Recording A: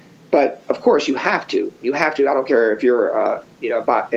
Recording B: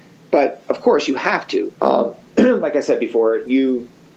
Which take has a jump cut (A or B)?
B